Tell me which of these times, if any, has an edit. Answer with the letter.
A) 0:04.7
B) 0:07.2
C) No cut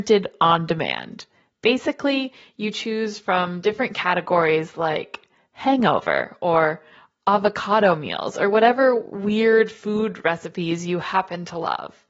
C